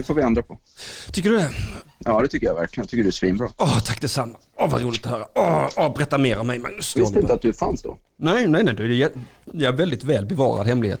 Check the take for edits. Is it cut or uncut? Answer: cut